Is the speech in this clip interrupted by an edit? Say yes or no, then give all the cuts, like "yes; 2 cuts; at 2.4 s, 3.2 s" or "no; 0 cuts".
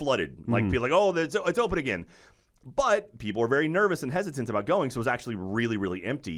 no; 0 cuts